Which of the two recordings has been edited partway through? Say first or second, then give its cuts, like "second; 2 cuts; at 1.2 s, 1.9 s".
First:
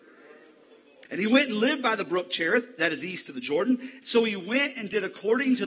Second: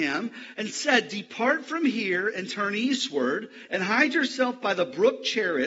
first; 2 cuts; at 1.1 s, 4.0 s